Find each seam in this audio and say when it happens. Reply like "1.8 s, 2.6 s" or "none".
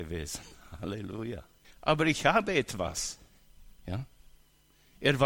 1.6 s, 3.8 s